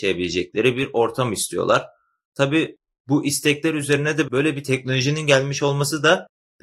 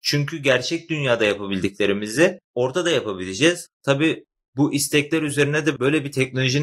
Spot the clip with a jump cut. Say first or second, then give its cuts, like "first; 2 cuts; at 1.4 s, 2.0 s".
second; 2 cuts; at 2.4 s, 3.7 s